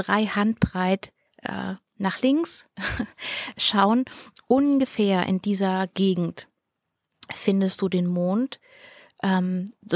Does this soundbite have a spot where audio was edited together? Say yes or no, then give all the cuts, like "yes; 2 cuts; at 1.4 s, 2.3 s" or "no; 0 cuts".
no; 0 cuts